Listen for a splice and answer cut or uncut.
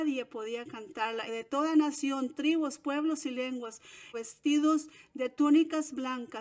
cut